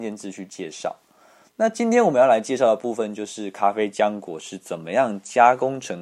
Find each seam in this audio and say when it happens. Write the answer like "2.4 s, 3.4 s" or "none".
1.4 s